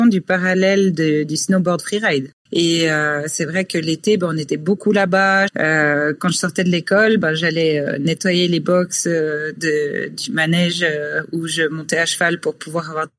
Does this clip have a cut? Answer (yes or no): yes